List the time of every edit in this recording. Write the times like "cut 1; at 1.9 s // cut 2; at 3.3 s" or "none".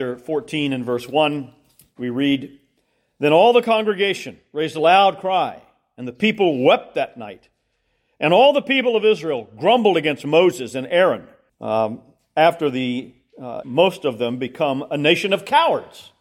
cut 1; at 11.5 s // cut 2; at 13.6 s